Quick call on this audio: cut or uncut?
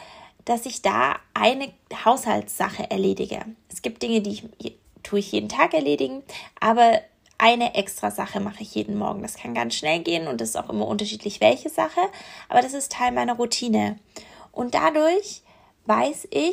uncut